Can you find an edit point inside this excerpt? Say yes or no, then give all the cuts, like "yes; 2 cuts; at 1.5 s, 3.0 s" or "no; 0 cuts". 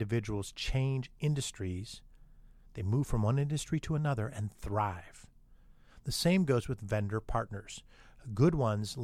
no; 0 cuts